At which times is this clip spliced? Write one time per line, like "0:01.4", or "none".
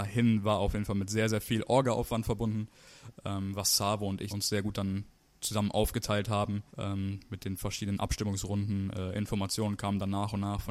0:04.3
0:06.7

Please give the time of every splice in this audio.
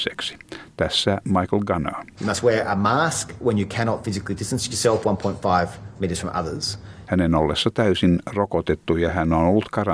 0:02.1
0:07.0

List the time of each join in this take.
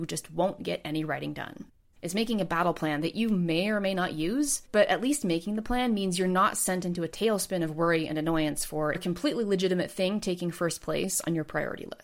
0:01.9

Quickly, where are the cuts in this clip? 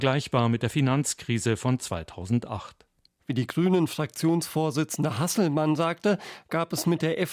0:03.2

